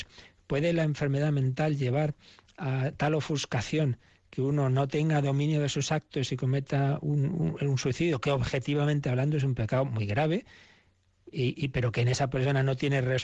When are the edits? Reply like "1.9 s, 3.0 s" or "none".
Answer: none